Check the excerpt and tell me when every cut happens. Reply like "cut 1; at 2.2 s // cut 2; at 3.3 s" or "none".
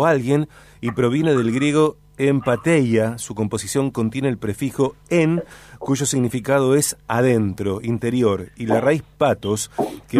none